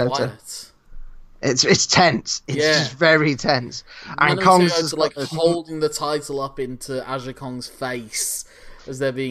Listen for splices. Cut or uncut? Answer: uncut